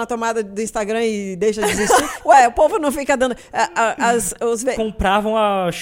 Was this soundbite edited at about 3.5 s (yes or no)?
no